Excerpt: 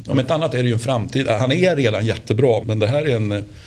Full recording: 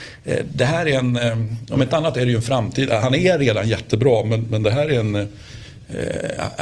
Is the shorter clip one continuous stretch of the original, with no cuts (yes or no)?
no